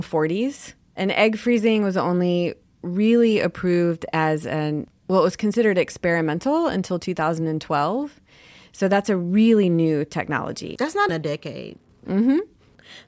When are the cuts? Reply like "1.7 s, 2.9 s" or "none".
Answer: 11.1 s